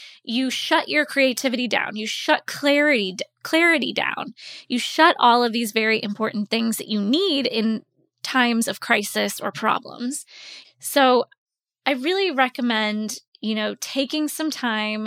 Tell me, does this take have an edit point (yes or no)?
yes